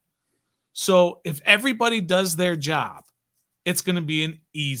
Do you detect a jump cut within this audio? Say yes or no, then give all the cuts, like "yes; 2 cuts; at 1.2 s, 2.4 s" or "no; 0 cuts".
yes; 1 cut; at 3.6 s